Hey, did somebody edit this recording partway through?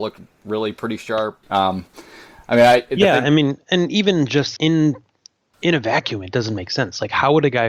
yes; 2 cuts; at 1.4 s, 4.6 s

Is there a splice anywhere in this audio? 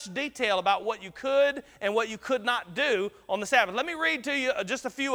no; 0 cuts

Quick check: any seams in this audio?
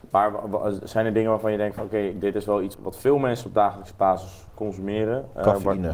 yes; 1 cut; at 2.7 s

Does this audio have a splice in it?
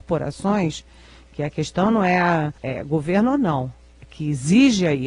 yes; 1 cut; at 2.6 s

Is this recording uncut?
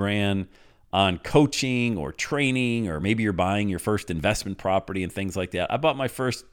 yes; 0 cuts

